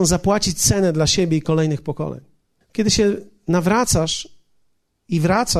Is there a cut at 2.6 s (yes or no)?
yes